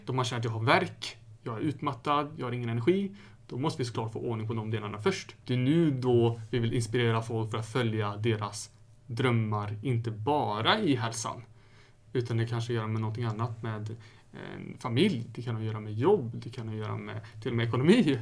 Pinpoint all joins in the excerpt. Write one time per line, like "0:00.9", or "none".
0:05.4